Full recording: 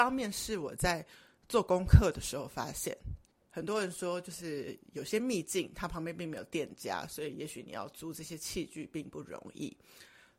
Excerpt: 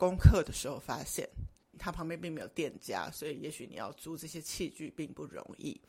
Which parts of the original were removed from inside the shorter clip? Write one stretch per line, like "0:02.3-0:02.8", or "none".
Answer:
0:03.4-0:05.7

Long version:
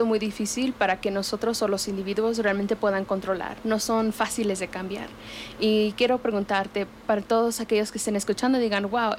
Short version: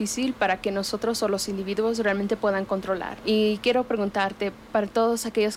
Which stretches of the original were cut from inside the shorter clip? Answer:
0:03.6-0:05.6

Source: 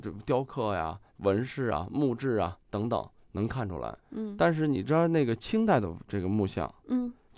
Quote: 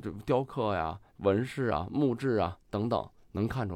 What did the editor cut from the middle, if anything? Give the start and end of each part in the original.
none

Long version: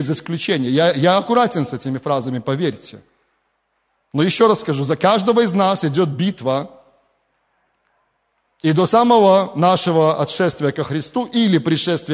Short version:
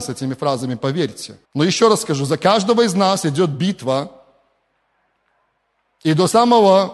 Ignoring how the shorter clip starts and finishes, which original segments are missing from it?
0:03.1-0:04.0

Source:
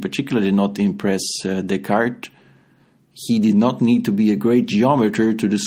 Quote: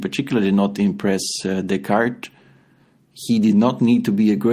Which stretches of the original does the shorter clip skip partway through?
none

